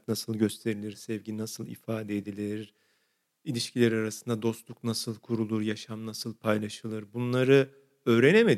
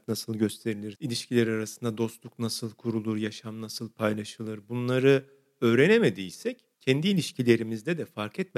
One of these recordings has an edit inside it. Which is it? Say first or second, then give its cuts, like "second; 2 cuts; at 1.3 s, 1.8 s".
second; 2 cuts; at 0.9 s, 6.7 s